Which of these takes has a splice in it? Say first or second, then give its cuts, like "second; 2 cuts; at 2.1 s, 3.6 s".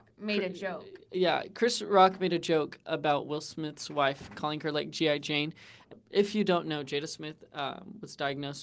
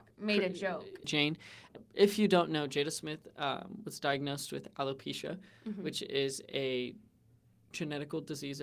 second; 1 cut; at 1.0 s